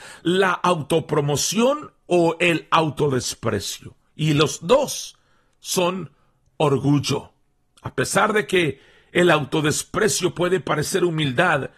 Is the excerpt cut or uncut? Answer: uncut